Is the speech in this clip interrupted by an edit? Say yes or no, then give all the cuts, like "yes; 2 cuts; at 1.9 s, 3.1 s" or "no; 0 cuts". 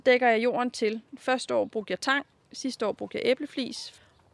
no; 0 cuts